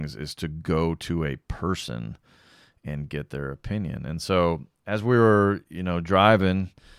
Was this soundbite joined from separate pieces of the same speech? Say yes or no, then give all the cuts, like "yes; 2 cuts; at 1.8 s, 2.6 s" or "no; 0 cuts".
no; 0 cuts